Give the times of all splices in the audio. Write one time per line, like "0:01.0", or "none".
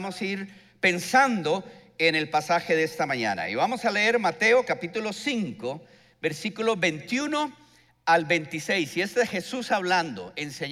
none